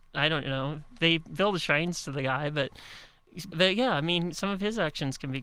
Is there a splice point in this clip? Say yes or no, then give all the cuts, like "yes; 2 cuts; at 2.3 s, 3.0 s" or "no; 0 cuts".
yes; 1 cut; at 3.5 s